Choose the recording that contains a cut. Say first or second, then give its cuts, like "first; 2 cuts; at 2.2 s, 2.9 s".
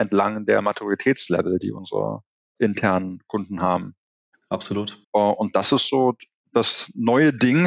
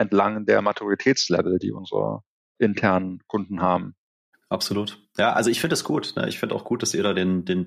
first; 1 cut; at 5.0 s